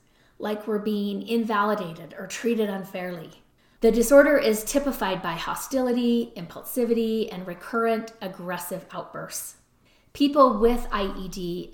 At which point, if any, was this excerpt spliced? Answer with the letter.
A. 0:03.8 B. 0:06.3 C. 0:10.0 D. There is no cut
A